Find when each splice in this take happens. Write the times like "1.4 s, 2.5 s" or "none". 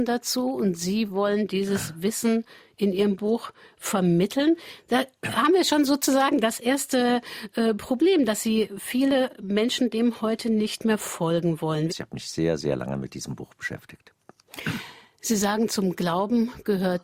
11.9 s